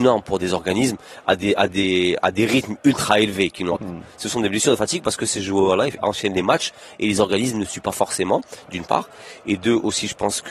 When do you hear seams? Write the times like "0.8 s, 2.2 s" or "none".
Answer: 3.8 s